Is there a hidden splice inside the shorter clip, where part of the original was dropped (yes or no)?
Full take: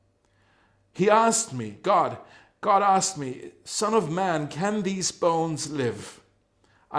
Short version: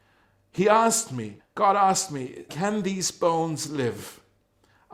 yes